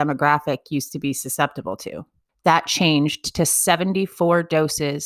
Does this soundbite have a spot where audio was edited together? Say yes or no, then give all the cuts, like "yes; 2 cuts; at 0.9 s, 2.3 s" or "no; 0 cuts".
yes; 1 cut; at 2.3 s